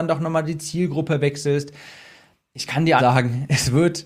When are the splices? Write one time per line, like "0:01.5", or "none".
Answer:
0:03.0